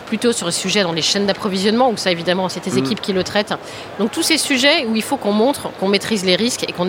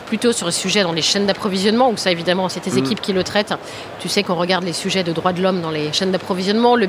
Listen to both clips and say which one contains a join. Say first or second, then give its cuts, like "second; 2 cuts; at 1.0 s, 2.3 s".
first; 1 cut; at 4.0 s